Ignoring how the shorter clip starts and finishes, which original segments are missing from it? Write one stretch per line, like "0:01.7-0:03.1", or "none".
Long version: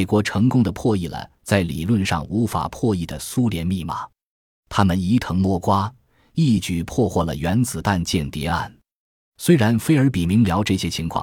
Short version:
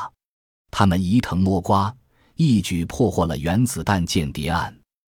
none